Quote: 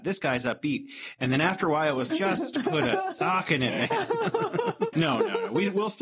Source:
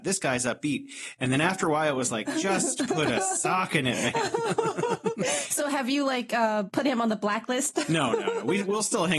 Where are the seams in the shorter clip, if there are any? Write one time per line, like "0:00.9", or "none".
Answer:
0:02.1
0:04.9